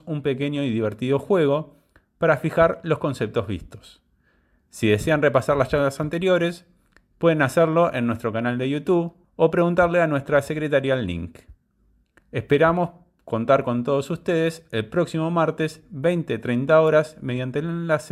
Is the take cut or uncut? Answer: cut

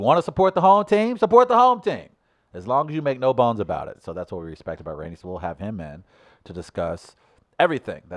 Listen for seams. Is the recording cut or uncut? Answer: uncut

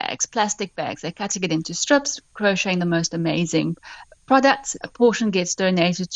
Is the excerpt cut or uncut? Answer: cut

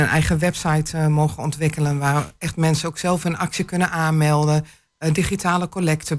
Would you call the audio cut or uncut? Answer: uncut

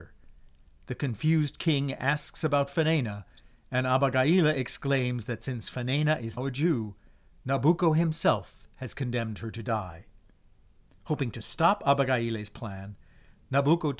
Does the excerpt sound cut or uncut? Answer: cut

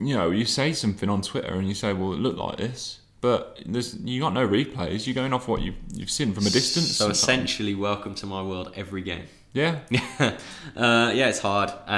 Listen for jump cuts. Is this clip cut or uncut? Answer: uncut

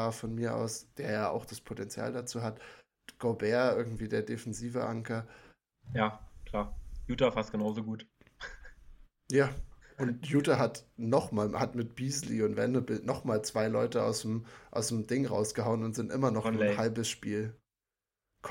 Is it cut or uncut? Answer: cut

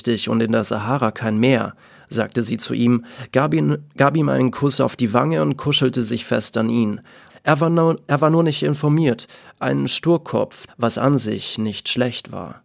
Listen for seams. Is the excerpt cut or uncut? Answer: cut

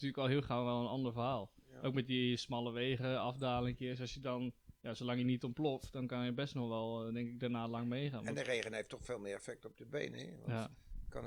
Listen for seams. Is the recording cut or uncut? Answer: uncut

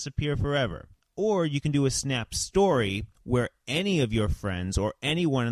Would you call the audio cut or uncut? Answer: uncut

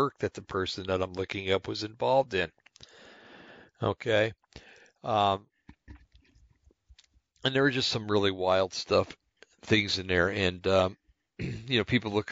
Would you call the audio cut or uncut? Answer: uncut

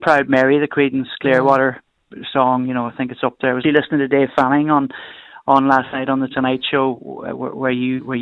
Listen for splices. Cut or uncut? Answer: cut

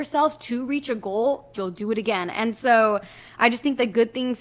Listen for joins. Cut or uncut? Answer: cut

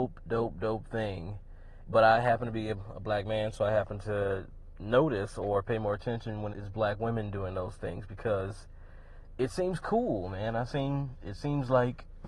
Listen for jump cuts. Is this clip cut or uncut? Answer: cut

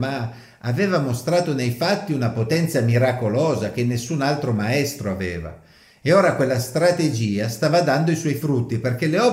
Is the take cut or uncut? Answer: uncut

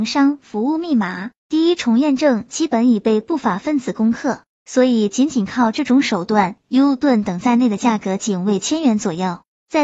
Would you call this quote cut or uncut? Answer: cut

